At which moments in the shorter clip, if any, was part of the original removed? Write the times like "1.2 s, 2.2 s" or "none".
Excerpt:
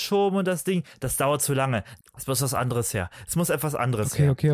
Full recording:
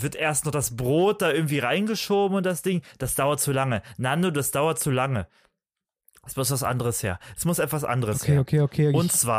2.0 s

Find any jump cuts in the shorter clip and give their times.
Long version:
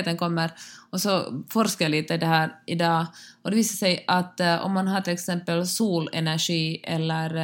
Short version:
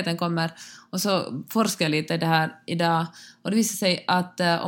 none

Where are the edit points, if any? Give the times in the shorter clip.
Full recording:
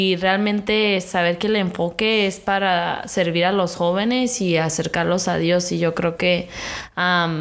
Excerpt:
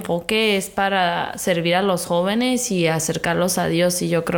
none

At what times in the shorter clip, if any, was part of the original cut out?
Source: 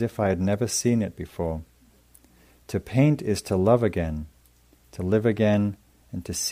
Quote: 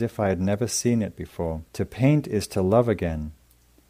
1.7 s

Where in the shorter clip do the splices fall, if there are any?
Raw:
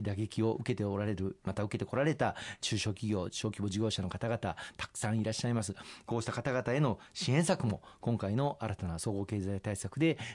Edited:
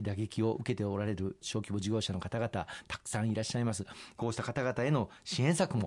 1.4 s

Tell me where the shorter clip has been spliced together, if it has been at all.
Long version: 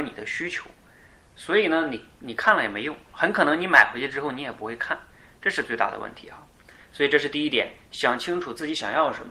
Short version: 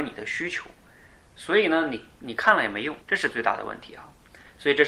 3.0 s

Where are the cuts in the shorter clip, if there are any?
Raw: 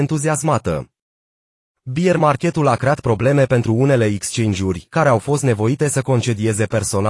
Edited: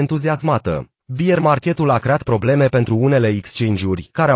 1.0 s

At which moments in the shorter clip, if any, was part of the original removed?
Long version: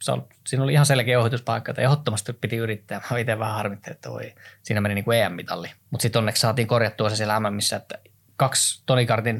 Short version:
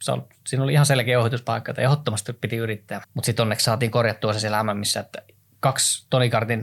3.0 s

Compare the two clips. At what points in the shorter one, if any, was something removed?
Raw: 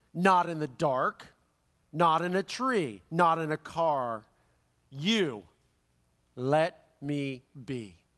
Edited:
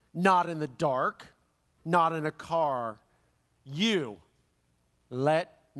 1.8 s

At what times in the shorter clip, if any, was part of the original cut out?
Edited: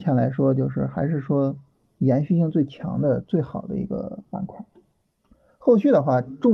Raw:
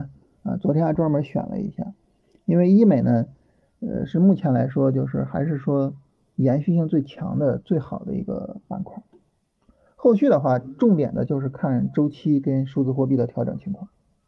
none

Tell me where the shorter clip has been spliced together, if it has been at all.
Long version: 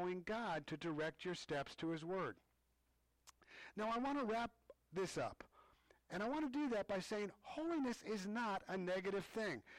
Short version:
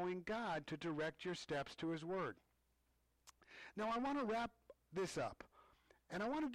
none

